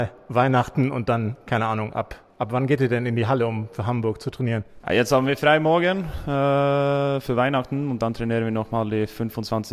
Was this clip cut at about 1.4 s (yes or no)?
no